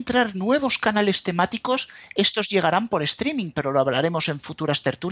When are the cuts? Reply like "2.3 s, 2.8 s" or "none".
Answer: none